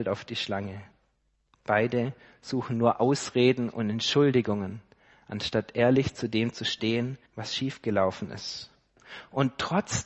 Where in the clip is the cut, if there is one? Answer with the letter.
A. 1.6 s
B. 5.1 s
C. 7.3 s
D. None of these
C